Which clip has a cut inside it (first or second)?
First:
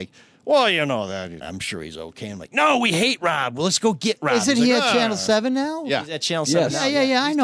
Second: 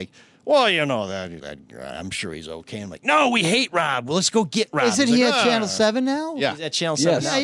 first